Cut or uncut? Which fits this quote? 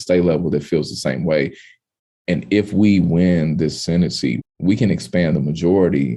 cut